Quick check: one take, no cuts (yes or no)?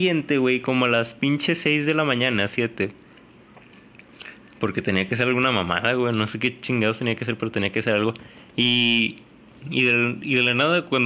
yes